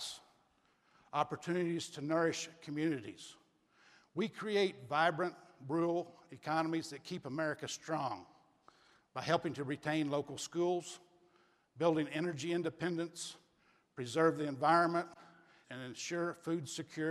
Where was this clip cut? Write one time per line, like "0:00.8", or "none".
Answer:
0:15.6